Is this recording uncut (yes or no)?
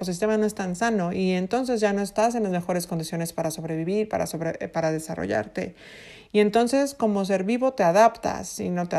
yes